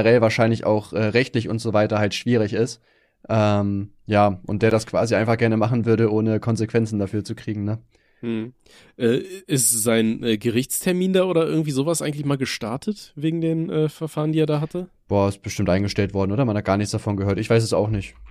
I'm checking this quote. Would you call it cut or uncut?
uncut